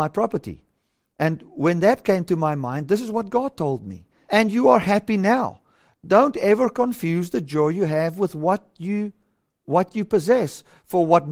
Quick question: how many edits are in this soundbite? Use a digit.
1